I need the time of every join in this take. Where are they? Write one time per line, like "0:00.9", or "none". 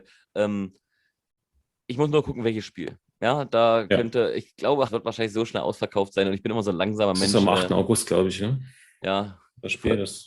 0:04.9